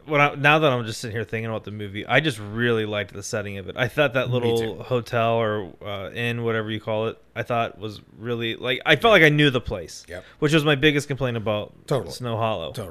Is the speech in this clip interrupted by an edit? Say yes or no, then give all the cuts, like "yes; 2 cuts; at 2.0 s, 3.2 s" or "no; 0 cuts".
no; 0 cuts